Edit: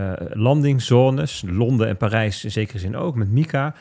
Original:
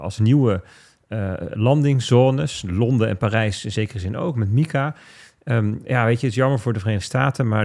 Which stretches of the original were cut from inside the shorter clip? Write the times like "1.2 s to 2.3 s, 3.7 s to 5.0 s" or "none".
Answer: none